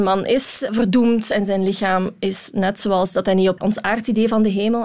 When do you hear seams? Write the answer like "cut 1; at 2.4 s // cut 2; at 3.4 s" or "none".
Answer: cut 1; at 3.6 s

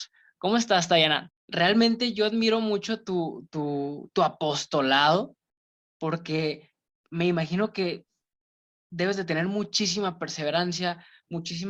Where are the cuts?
cut 1; at 1.3 s

